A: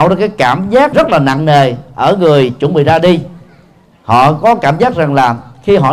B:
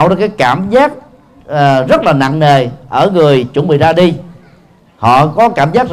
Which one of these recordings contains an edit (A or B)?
A